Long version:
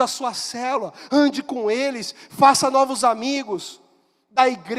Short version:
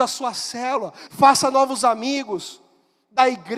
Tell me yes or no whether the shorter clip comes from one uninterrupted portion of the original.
no